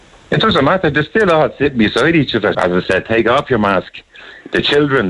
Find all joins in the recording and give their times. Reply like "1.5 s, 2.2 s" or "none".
2.5 s